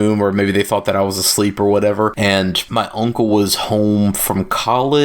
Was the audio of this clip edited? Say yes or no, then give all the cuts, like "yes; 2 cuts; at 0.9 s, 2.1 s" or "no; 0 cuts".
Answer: yes; 1 cut; at 2.1 s